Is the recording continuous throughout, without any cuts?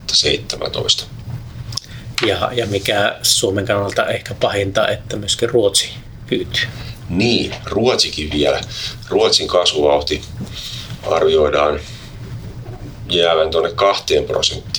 yes; 0 cuts

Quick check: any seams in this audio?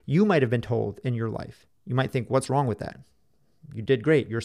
yes; 1 cut; at 1.7 s

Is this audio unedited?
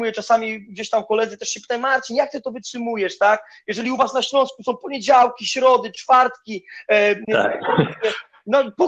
yes; 0 cuts

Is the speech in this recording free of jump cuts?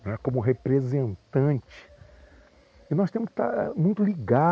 yes; 0 cuts

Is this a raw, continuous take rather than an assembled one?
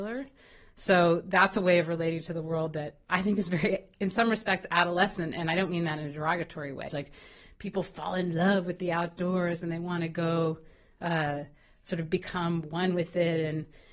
no; 1 cut; at 6.9 s

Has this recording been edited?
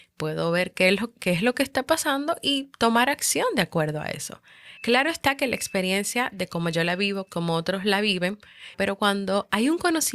yes; 3 cuts; at 4.8 s, 7.3 s, 8.7 s

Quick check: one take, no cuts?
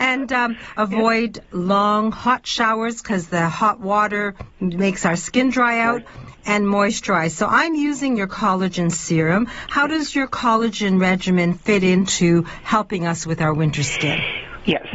yes; 0 cuts

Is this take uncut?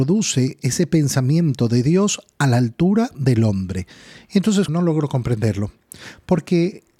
no; 1 cut; at 4.7 s

